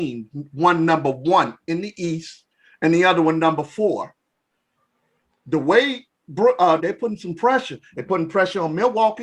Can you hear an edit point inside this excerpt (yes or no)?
yes